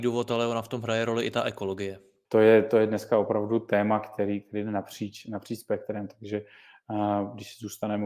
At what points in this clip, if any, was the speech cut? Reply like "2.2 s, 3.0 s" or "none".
2.3 s